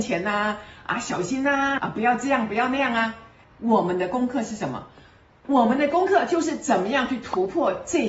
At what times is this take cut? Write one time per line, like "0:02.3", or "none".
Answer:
0:01.8
0:03.4